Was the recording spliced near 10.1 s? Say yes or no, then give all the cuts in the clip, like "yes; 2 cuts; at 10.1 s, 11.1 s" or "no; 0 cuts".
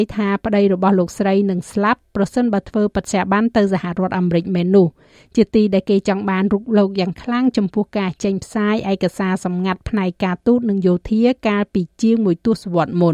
no; 0 cuts